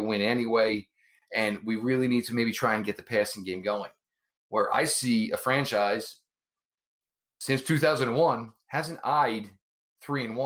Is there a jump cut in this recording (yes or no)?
no